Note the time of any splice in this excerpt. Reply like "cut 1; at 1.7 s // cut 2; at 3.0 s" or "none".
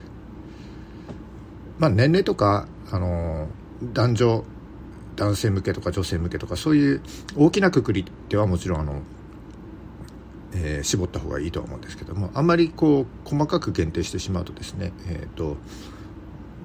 none